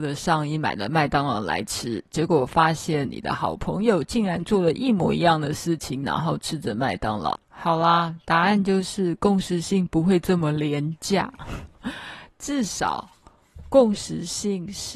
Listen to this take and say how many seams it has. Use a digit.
2